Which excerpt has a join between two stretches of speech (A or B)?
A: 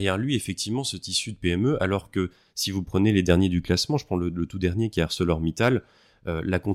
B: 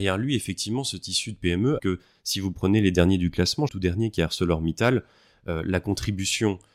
B